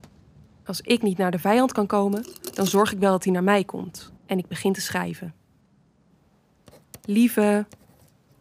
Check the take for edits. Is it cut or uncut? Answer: cut